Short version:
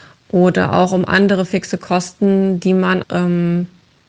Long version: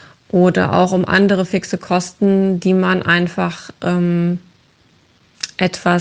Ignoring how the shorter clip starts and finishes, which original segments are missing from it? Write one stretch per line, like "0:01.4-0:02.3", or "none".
0:03.0-0:03.7